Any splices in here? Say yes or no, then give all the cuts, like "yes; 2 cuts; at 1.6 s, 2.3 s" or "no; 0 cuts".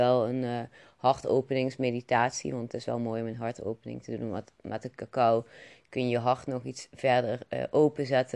no; 0 cuts